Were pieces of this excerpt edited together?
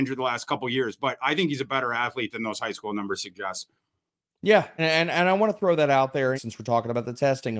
yes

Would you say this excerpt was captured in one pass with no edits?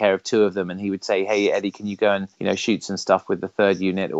no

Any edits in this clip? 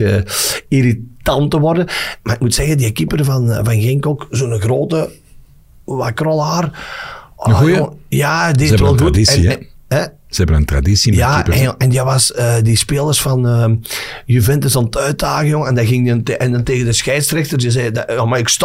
no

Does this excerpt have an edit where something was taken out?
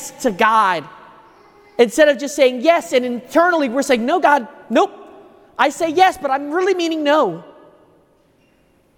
no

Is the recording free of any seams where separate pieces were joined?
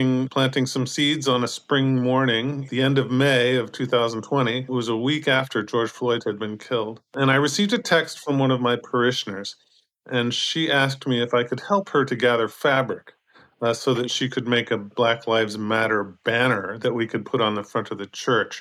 yes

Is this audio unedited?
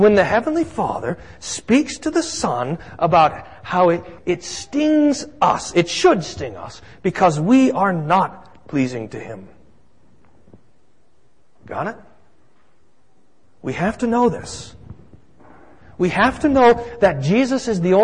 no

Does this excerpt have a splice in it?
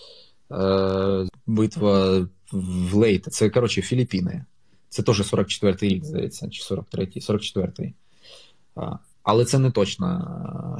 yes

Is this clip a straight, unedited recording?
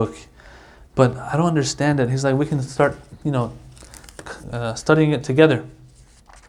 no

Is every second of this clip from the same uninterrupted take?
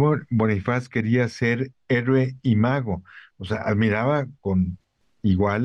yes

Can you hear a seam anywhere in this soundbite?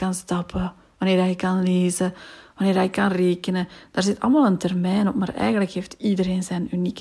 no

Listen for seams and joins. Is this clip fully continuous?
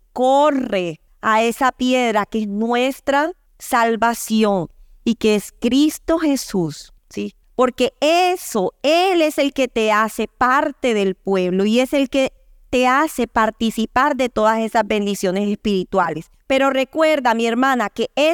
yes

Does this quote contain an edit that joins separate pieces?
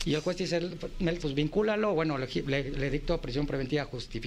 yes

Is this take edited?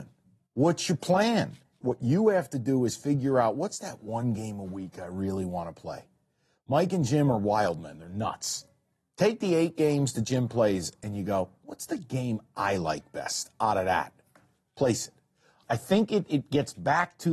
yes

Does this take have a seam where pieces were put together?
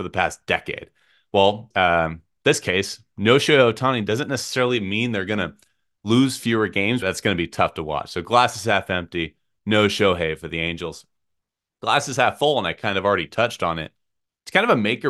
yes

